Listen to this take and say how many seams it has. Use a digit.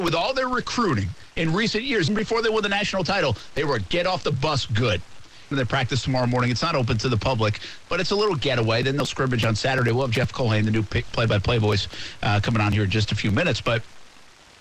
2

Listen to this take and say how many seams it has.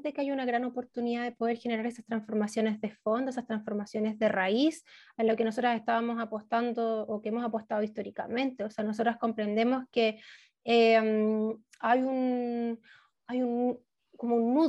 0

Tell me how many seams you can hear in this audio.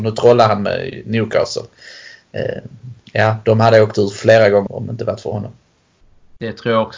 1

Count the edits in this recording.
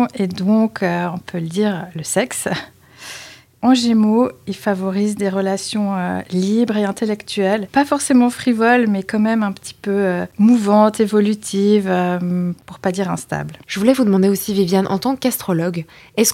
1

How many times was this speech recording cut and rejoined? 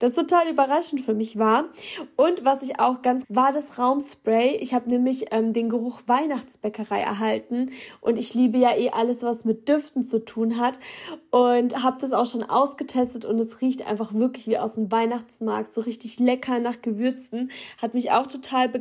1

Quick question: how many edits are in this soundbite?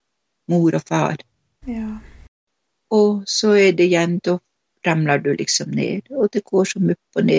1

